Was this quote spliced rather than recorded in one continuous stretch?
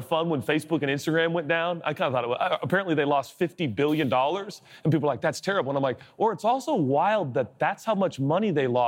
no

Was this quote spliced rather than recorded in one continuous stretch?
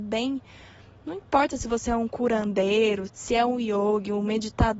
yes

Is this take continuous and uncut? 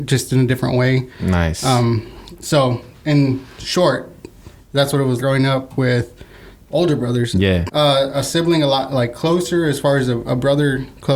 no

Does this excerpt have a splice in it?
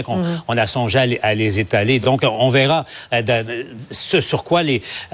no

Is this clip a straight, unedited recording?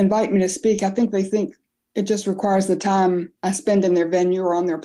no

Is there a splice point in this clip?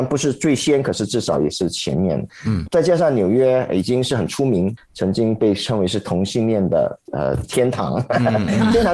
no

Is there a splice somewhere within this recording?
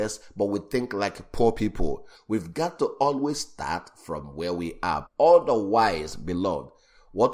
yes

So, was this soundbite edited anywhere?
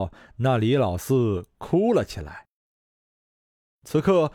no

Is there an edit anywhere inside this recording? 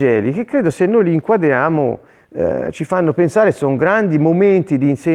no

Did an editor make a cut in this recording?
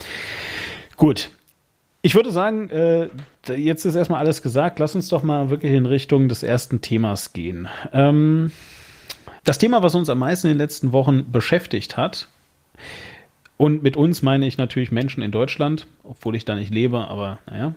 yes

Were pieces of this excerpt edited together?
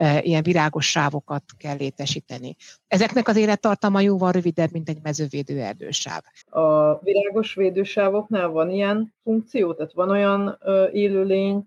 yes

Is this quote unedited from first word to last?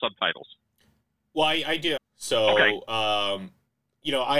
no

